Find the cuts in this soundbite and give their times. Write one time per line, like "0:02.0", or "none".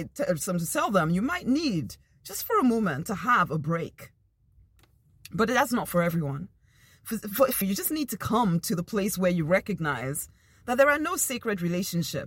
0:07.6